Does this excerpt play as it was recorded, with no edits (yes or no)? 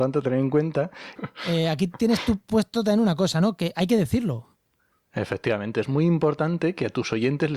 no